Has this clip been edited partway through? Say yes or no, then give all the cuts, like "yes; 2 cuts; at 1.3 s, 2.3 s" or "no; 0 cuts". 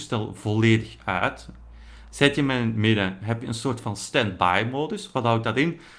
no; 0 cuts